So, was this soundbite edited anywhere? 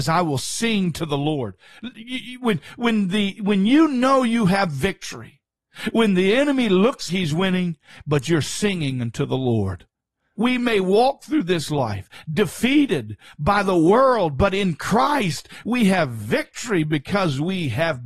yes; 2 cuts; at 7.1 s, 10.4 s

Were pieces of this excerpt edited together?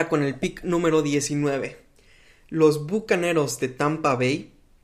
no; 0 cuts

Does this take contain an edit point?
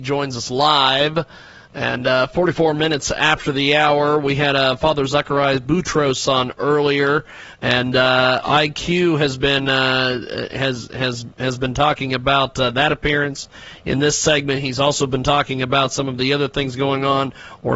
no; 0 cuts

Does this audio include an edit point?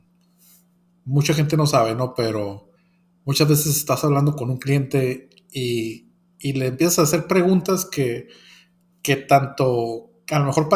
no; 0 cuts

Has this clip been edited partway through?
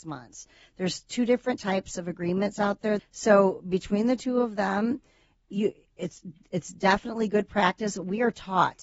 yes; 1 cut; at 3.0 s

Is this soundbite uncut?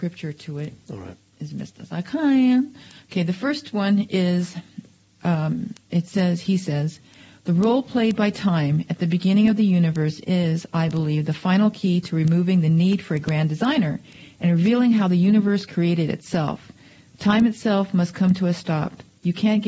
yes; 0 cuts

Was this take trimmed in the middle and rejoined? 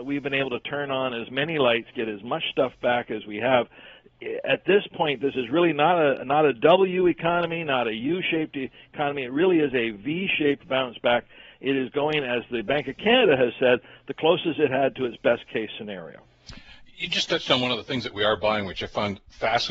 no; 0 cuts

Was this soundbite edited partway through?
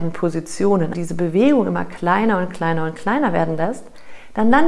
yes; 1 cut; at 0.9 s

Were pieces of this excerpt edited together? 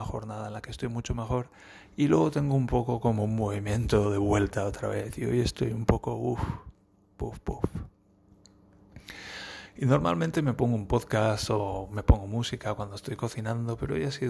no; 0 cuts

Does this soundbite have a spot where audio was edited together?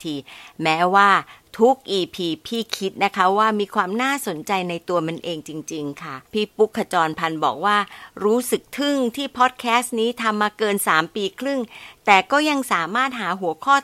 yes; 1 cut; at 6.2 s

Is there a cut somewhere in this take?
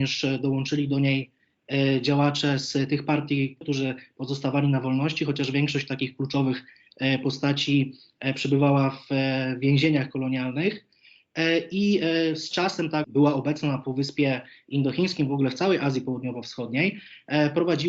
yes; 2 cuts; at 3.6 s, 13.0 s

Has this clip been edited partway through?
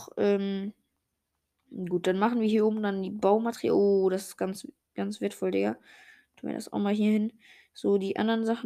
no; 0 cuts

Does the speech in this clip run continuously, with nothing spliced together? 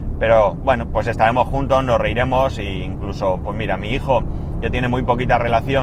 yes; 0 cuts

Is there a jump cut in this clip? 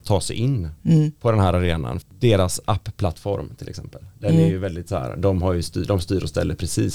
yes; 1 cut; at 2.0 s

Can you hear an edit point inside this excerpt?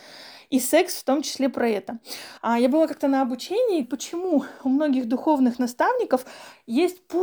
yes; 2 cuts; at 2.4 s, 3.8 s

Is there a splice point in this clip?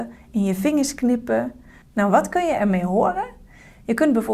no; 0 cuts

